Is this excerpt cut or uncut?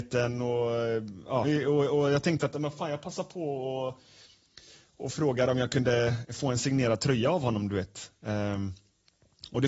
cut